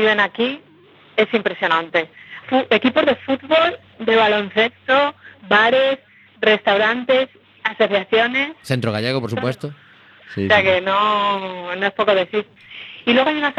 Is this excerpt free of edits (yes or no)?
no